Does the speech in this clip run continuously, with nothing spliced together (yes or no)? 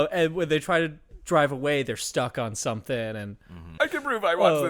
no